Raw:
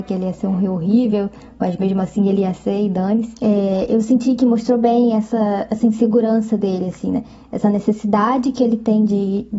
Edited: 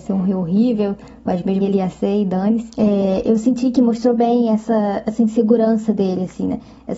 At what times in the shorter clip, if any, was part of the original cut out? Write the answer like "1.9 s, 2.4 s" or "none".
1.6 s

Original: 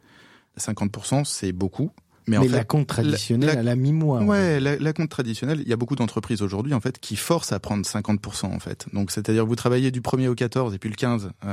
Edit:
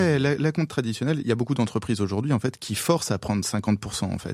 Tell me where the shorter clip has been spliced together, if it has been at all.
none

